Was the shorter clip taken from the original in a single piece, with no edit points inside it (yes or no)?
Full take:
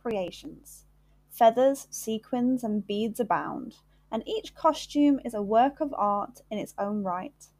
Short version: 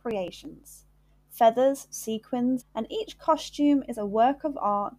no